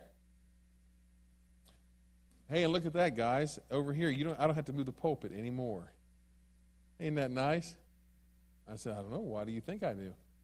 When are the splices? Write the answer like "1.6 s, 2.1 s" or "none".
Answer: 8.6 s